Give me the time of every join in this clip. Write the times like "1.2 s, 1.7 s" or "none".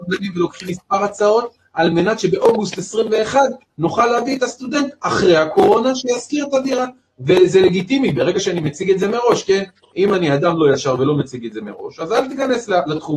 none